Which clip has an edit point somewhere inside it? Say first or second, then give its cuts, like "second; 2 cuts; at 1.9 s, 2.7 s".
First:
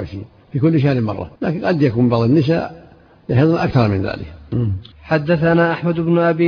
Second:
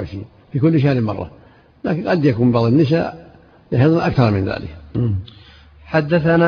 first; 2 cuts; at 1.4 s, 4.9 s